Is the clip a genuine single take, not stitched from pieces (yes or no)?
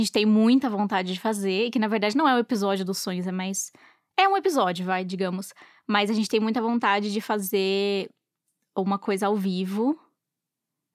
yes